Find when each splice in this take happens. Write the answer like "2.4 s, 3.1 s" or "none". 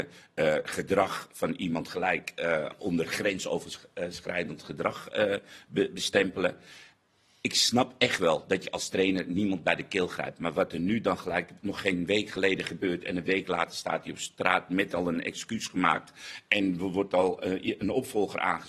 none